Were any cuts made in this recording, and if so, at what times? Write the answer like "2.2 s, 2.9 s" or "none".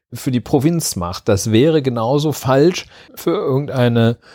3.1 s